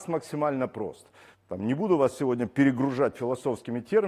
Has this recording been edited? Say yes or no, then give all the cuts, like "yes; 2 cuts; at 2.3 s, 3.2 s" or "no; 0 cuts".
yes; 1 cut; at 1.3 s